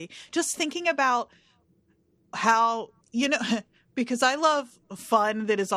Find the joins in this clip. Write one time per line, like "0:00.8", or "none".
0:03.0